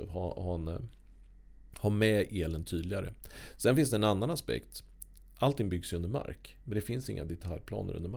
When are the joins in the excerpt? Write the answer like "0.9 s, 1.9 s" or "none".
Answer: 6.6 s